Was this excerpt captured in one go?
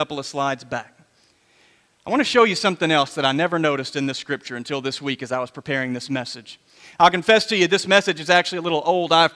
yes; 0 cuts

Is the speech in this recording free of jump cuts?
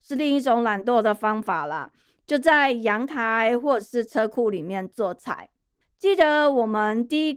no; 1 cut; at 5.8 s

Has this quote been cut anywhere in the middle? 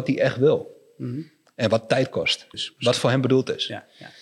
yes; 1 cut; at 2.5 s

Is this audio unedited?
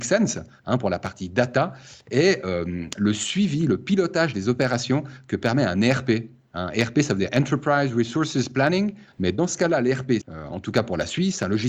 no; 2 cuts; at 9.1 s, 10.2 s

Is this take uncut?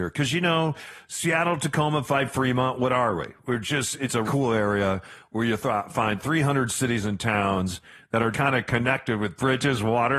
no; 2 cuts; at 4.3 s, 8.3 s

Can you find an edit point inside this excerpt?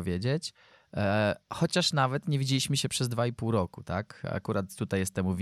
no; 0 cuts

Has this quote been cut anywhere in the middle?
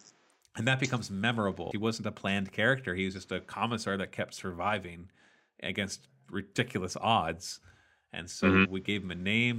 yes; 1 cut; at 1.7 s

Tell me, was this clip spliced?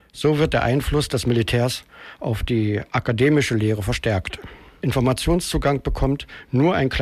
yes; 1 cut; at 4.8 s

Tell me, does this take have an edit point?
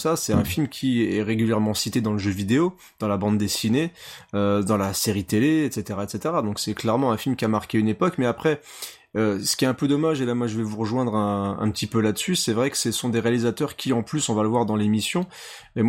no; 0 cuts

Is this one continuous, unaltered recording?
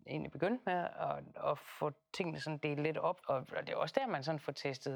no; 1 cut; at 3.2 s

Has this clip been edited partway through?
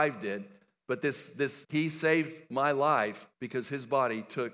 yes; 2 cuts; at 1.6 s, 3.3 s

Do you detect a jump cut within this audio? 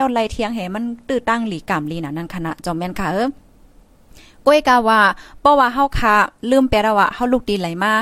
no; 0 cuts

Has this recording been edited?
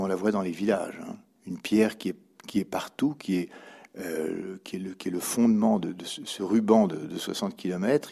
yes; 1 cut; at 1.4 s

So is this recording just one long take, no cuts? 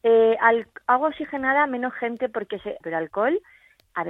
no; 1 cut; at 2.8 s

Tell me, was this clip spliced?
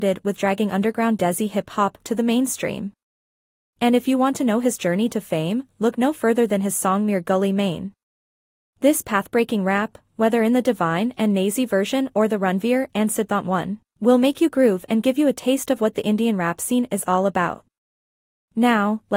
no; 0 cuts

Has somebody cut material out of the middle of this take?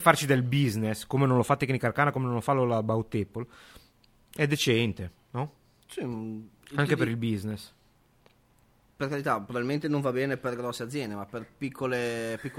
no; 0 cuts

